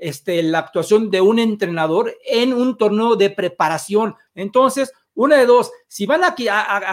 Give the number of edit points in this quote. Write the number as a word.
one